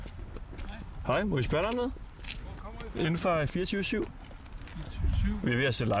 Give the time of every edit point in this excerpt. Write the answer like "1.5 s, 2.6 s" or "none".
none